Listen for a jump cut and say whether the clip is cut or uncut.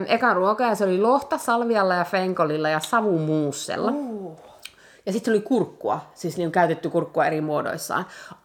uncut